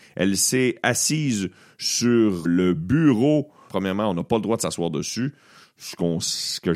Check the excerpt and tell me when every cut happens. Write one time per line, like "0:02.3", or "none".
0:02.4
0:03.7